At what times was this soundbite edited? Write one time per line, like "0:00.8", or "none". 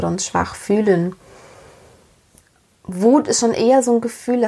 none